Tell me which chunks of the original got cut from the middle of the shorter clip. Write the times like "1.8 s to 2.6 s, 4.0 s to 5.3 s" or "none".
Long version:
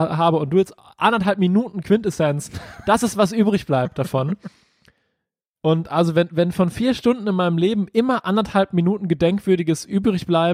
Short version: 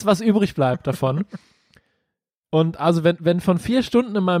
none